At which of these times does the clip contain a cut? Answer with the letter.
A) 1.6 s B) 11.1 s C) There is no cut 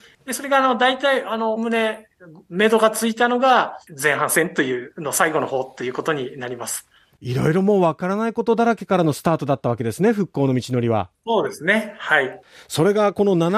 A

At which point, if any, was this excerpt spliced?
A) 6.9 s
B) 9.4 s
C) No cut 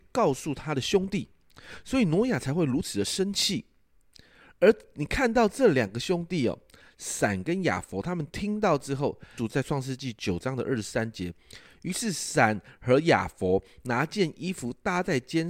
B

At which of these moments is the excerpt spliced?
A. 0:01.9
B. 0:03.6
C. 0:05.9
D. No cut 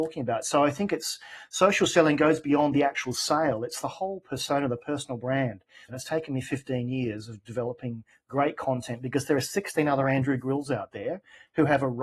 C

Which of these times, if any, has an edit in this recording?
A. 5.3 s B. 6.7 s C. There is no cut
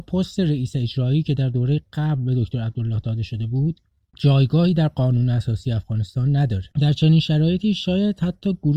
B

